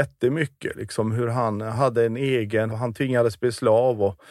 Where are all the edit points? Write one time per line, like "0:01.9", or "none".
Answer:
0:02.7